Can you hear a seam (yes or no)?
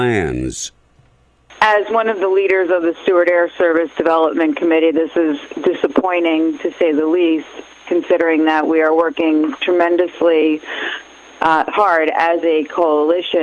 no